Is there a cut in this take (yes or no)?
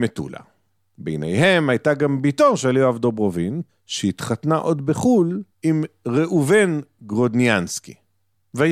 yes